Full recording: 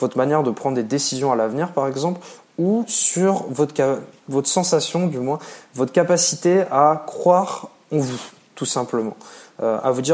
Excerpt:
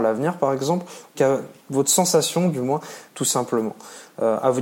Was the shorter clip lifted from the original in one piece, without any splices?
no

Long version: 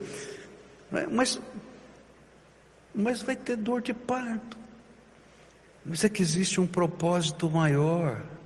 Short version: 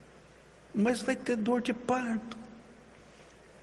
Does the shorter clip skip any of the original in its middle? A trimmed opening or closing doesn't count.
no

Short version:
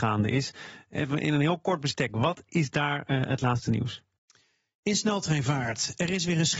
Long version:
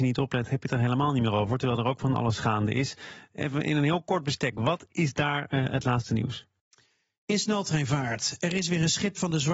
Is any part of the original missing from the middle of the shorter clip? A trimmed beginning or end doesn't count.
no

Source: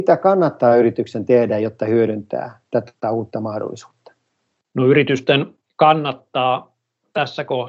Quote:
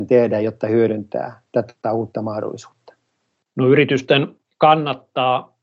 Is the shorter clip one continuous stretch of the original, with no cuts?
yes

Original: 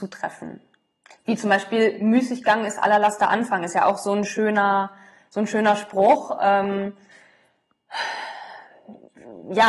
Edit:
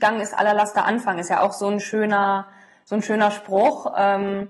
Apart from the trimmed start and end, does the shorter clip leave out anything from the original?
no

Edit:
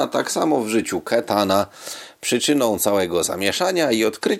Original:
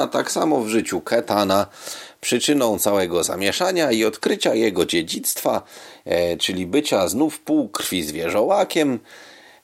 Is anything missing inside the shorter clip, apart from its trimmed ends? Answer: no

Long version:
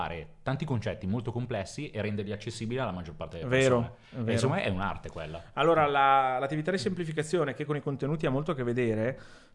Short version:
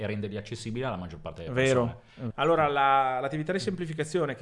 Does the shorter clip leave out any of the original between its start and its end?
yes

